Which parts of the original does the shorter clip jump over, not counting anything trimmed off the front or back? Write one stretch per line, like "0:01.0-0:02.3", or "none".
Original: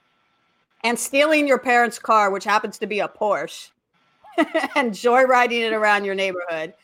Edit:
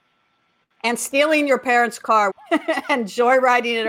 0:02.3-0:04.2